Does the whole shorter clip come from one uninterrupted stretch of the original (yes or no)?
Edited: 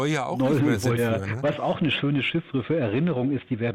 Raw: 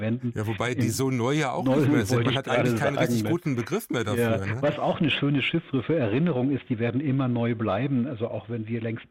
no